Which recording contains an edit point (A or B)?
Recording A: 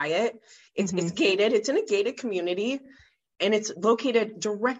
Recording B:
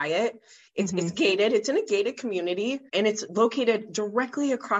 B